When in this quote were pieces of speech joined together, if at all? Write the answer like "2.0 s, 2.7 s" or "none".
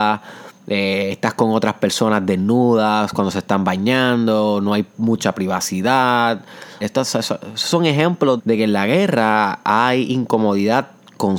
6.8 s, 8.4 s